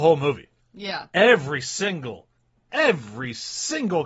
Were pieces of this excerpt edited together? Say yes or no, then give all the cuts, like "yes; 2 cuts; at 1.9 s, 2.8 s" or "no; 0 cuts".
no; 0 cuts